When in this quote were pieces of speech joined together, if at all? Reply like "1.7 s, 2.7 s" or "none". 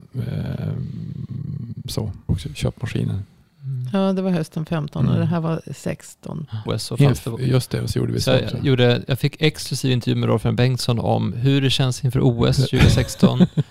2.3 s, 6.7 s